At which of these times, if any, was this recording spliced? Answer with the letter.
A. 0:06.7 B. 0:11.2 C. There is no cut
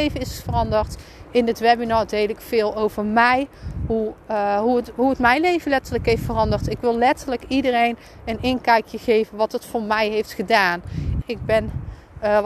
B